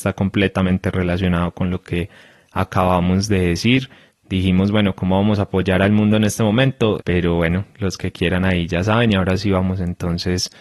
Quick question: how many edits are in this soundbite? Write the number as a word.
one